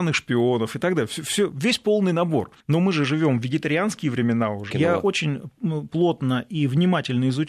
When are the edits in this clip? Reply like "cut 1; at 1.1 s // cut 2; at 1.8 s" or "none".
cut 1; at 2.6 s // cut 2; at 4.7 s

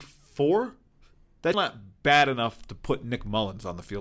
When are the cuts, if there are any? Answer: cut 1; at 1.5 s

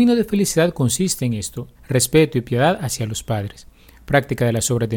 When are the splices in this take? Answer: cut 1; at 1.8 s

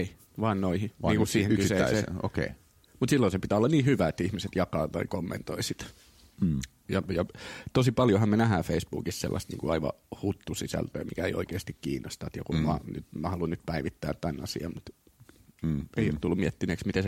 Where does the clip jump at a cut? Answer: none

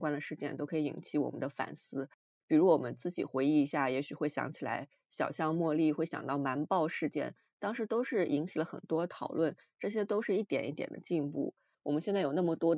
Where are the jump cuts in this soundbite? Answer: cut 1; at 11.7 s

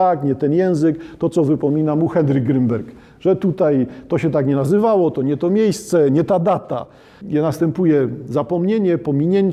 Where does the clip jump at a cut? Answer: cut 1; at 7.2 s

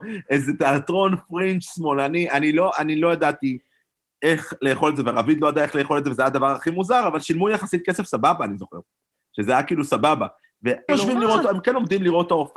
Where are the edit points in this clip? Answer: cut 1; at 10.9 s

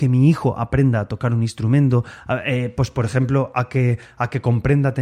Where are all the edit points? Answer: none

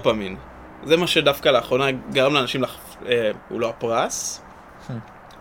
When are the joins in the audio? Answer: cut 1; at 3.4 s

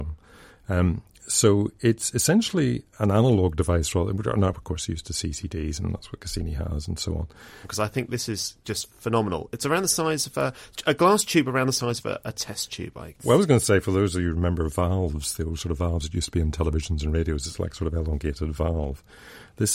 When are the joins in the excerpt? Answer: cut 1; at 7.6 s

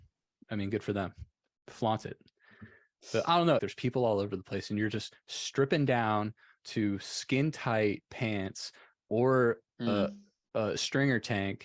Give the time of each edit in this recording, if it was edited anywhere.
cut 1; at 3.6 s

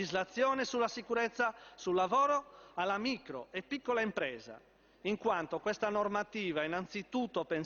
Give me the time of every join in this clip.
none

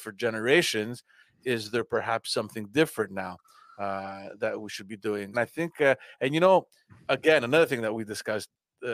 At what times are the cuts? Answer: cut 1; at 5.3 s

